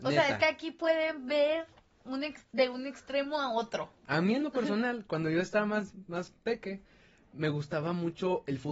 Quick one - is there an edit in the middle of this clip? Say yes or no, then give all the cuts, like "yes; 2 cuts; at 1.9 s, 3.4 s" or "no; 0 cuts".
yes; 1 cut; at 4.0 s